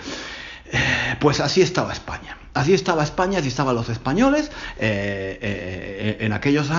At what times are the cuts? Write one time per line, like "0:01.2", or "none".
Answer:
none